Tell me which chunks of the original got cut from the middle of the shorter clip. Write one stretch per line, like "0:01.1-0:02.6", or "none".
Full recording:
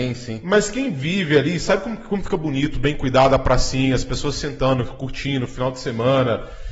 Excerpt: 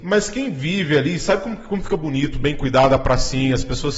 none

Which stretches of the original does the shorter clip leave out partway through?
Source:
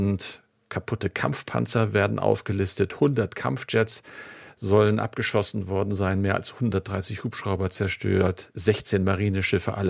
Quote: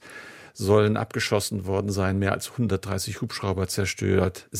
none

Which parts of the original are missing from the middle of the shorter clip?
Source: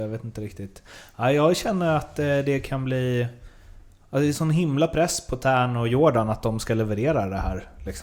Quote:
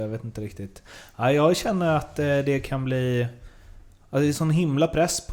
none

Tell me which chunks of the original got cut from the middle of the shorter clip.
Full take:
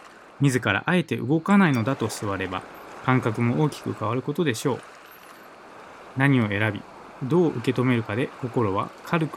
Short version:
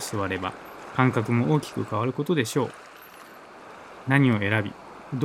none

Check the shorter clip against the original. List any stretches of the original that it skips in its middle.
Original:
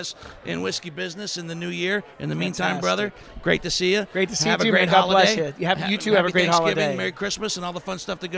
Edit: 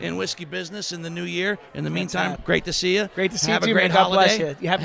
0:02.8-0:03.3

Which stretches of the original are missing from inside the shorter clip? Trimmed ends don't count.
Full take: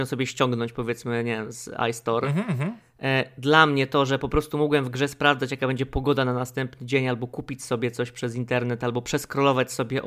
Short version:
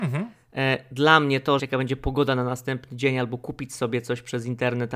0:04.1-0:05.5

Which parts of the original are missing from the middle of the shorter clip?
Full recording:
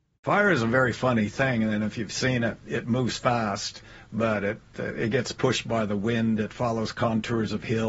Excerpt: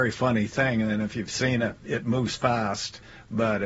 none

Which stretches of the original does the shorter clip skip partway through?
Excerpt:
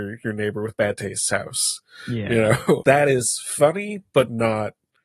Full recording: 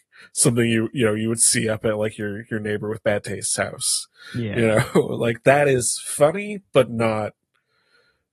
0:05.1-0:05.4

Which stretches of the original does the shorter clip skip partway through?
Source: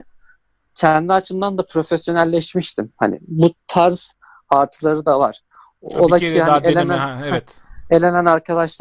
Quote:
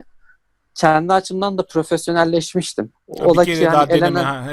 0:02.9-0:05.7

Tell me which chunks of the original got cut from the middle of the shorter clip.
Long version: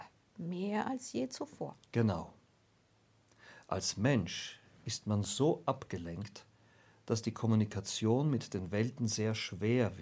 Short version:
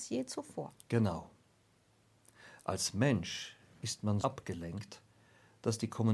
0:05.2-0:05.6

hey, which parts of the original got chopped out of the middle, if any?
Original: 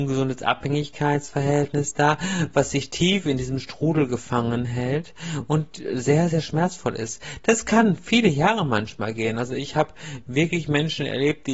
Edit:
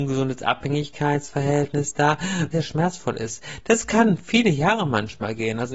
0:02.5-0:06.3

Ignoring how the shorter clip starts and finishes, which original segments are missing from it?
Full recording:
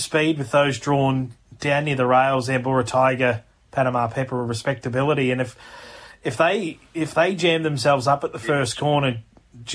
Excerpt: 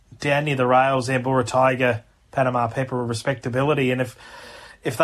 none

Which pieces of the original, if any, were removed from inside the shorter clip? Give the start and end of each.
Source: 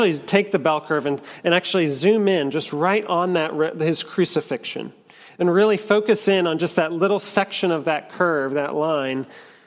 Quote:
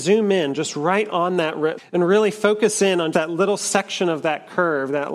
0:03.7-0:05.2
0:06.6-0:06.7

